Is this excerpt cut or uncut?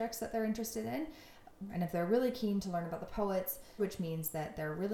cut